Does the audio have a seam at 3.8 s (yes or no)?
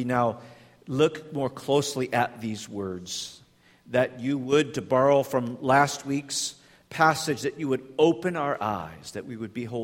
no